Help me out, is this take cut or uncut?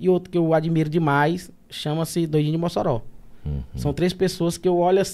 uncut